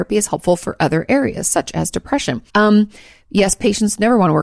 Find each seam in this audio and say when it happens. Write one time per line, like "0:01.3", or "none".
0:02.5